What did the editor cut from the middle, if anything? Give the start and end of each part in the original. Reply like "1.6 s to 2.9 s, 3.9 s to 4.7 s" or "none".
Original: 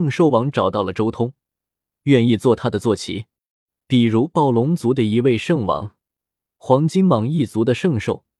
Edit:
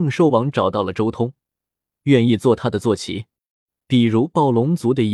none